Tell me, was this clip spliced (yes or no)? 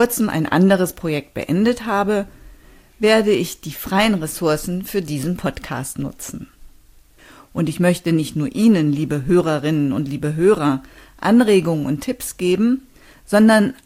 no